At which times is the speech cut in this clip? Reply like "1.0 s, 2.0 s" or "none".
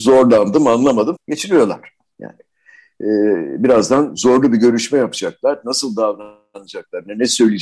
1.2 s